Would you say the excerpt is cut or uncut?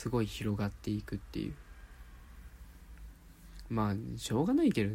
uncut